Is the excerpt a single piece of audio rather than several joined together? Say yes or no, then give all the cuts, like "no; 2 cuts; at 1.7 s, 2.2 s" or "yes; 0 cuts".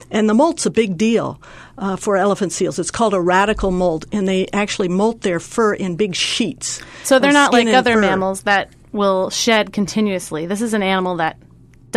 yes; 0 cuts